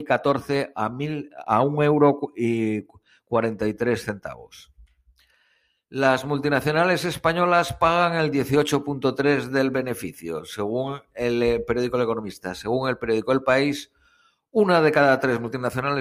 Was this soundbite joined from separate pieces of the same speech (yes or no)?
no